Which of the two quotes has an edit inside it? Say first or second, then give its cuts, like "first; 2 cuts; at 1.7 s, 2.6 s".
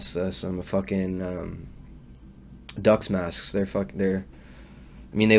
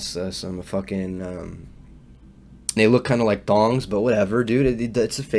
second; 1 cut; at 2.8 s